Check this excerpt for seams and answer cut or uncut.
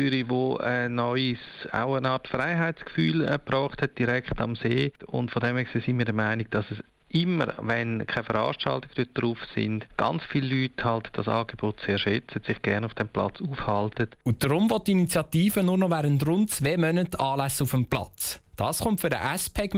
uncut